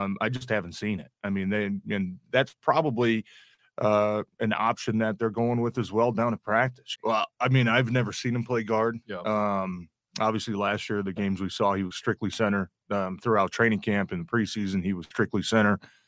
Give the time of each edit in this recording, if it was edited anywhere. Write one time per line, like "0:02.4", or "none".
0:07.0